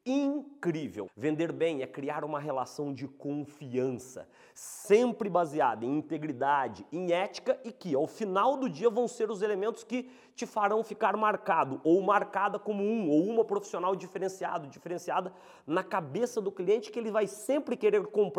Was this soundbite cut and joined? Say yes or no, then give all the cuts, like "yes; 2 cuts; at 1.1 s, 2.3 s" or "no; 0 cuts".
yes; 1 cut; at 1.1 s